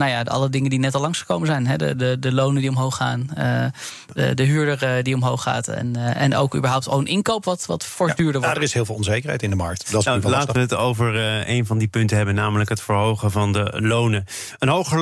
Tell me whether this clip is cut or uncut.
uncut